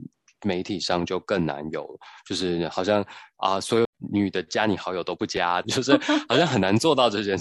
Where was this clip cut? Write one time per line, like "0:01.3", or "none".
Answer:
0:03.8
0:05.6